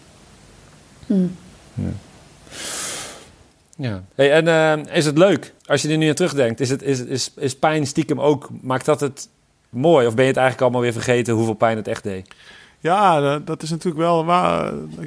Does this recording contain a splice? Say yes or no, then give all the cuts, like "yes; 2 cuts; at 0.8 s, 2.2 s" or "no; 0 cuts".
yes; 1 cut; at 5.6 s